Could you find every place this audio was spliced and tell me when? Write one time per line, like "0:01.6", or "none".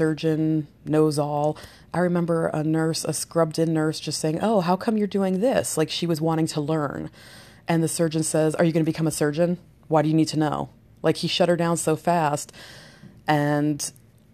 none